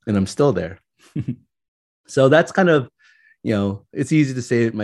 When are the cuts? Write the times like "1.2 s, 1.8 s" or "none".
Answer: none